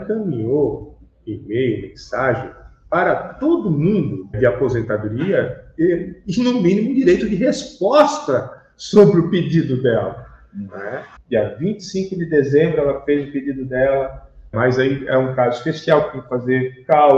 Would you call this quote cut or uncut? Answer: cut